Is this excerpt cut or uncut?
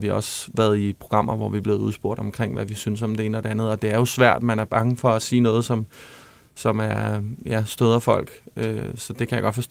uncut